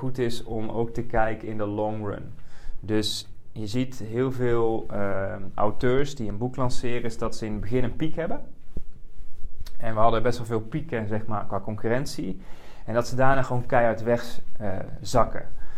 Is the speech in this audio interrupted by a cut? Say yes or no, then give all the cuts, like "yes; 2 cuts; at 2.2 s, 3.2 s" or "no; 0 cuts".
no; 0 cuts